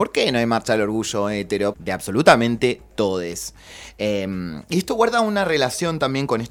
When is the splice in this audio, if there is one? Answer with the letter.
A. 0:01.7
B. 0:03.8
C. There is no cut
A